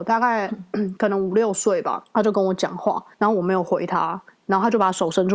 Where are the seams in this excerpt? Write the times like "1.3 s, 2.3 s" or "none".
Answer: none